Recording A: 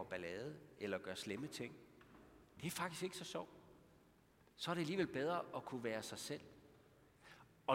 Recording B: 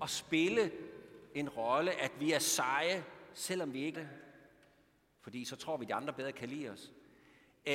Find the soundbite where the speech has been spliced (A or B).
B